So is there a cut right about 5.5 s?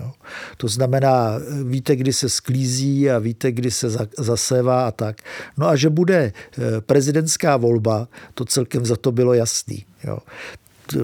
no; 0 cuts

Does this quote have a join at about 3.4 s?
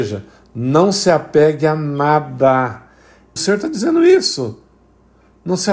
yes; 1 cut; at 3.4 s

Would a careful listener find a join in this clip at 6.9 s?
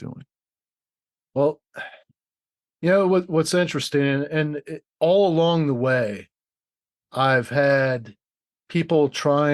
yes; 2 cuts; at 4.9 s, 6.9 s

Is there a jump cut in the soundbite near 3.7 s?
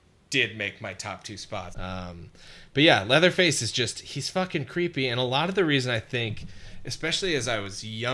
no; 1 cut; at 1.7 s

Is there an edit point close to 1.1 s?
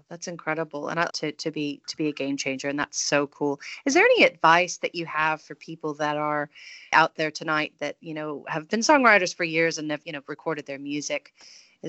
yes; 3 cuts; at 1.1 s, 6.9 s, 10.0 s

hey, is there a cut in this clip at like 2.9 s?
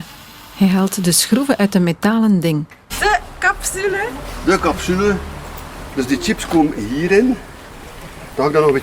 yes; 1 cut; at 2.9 s

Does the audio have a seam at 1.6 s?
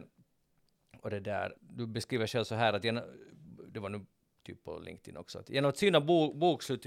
yes; 1 cut; at 1.6 s

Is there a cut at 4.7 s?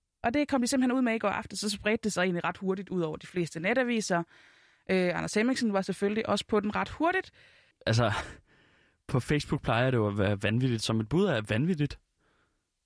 no; 1 cut; at 7.7 s

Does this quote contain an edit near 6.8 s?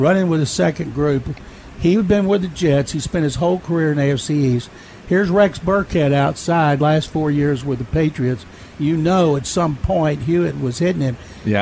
no; 0 cuts

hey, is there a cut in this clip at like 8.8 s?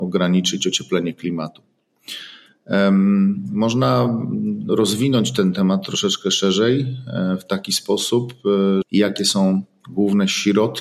yes; 1 cut; at 8.8 s

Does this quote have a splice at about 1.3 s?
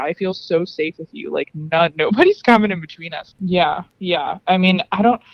no; 1 cut; at 3.3 s

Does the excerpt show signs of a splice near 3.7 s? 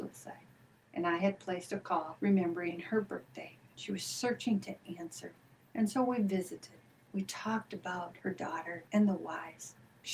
yes; 1 cut; at 3.7 s

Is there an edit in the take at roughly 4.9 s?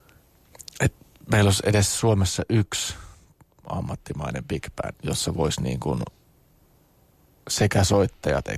yes; 1 cut; at 4.9 s

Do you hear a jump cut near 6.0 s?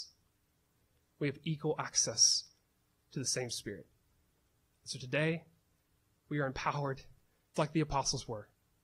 no; 1 cut; at 7.6 s

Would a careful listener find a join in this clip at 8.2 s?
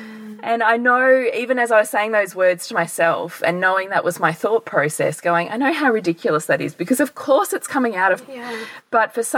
yes; 1 cut; at 8.2 s

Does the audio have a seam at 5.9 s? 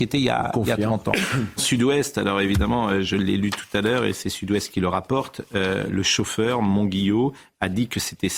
yes; 2 cuts; at 1.6 s, 5.9 s

